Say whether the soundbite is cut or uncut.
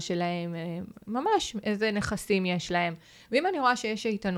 uncut